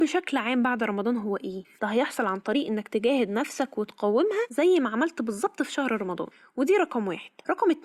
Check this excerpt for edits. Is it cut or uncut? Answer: cut